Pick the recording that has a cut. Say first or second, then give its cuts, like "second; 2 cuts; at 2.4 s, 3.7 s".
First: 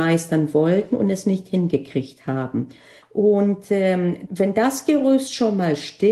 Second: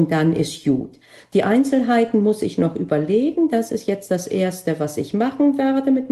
first; 2 cuts; at 3.0 s, 4.3 s